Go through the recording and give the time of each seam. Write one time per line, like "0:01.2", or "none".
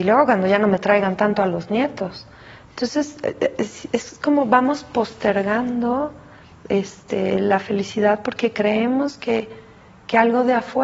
none